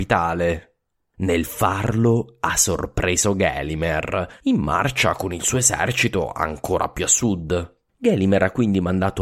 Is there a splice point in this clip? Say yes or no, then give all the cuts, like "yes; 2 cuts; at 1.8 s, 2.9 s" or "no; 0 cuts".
yes; 1 cut; at 7.9 s